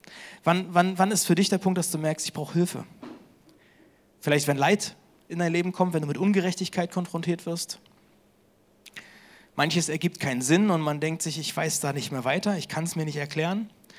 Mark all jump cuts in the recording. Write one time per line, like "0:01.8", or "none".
none

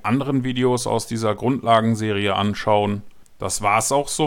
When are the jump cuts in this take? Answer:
0:03.2

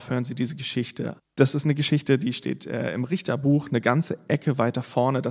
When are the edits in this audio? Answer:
0:01.2

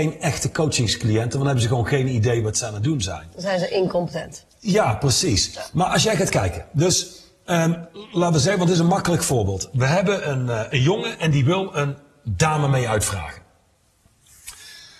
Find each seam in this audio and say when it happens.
none

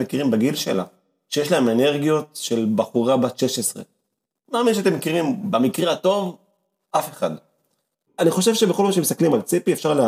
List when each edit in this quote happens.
0:08.1

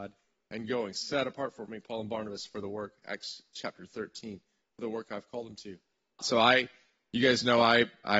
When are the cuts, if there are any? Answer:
0:06.2

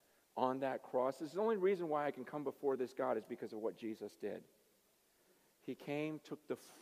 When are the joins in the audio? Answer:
none

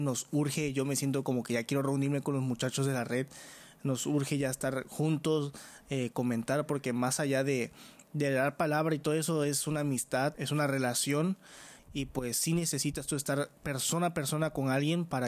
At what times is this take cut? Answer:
0:10.3
0:11.8
0:13.6

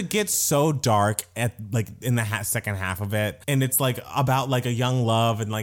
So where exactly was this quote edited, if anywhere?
0:03.4

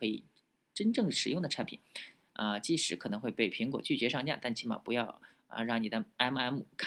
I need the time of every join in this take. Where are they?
none

